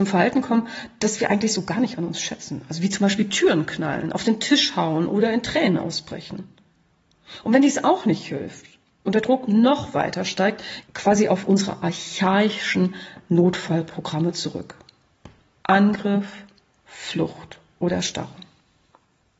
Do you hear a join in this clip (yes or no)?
yes